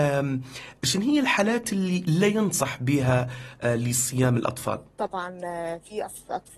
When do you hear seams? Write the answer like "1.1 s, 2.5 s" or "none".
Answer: 4.9 s